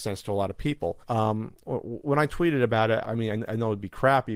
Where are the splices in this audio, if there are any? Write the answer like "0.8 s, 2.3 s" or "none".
1.0 s, 3.0 s